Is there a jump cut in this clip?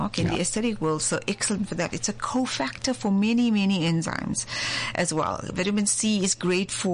no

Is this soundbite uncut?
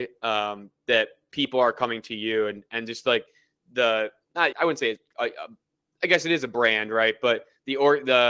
no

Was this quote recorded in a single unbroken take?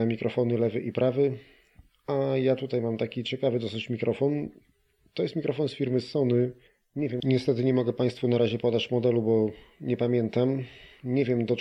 yes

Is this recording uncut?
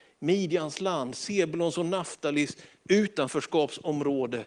yes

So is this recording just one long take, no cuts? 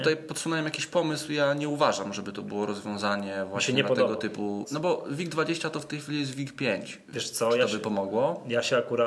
no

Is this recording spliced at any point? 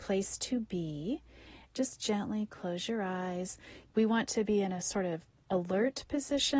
yes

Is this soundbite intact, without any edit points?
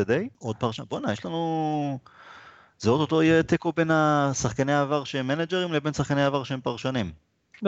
yes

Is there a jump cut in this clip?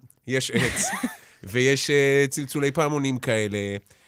no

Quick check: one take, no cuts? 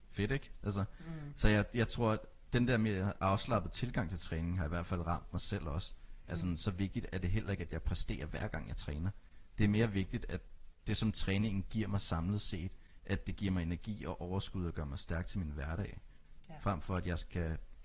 yes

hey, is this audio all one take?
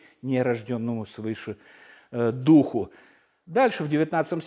yes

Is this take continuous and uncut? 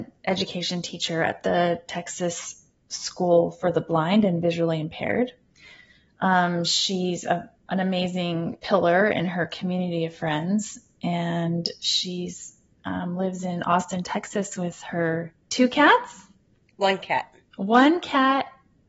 no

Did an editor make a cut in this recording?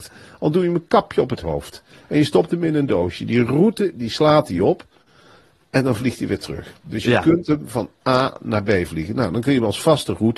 no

